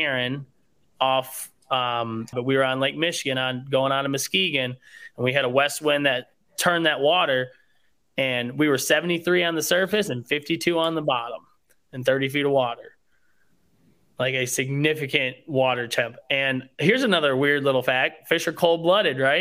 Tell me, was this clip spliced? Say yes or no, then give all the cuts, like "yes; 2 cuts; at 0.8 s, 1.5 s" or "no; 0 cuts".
yes; 1 cut; at 2.3 s